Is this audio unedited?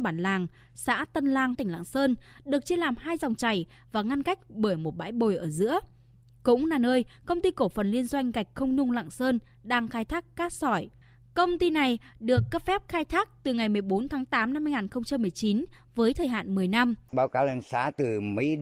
no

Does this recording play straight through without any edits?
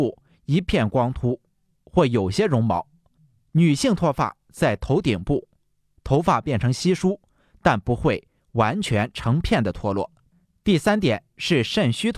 yes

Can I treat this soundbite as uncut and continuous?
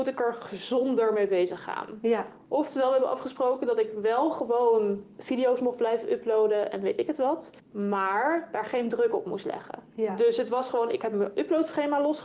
no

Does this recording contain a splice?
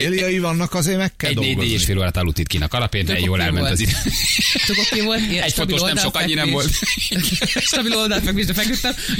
no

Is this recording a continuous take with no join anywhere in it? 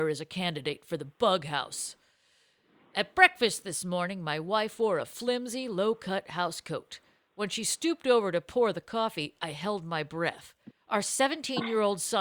yes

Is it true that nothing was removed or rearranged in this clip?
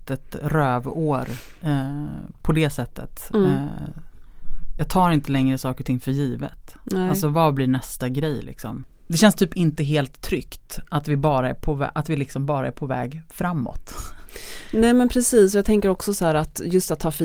yes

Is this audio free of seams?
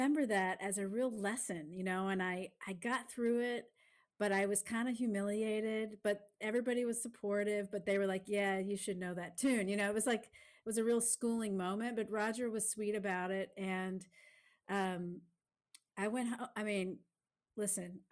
yes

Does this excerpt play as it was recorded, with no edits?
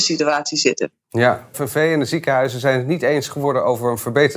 no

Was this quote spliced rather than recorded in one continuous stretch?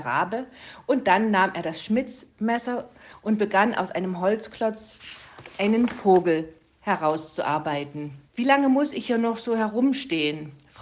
yes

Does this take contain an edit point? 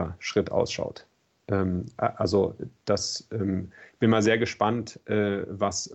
no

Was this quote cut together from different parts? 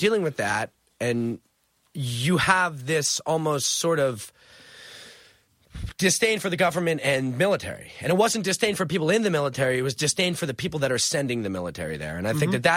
no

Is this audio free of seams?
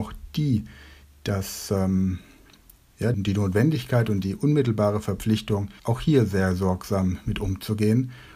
no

